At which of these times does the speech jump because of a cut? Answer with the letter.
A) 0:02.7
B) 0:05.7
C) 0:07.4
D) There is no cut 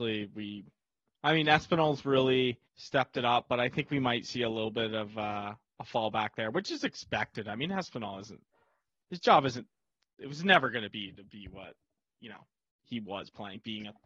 A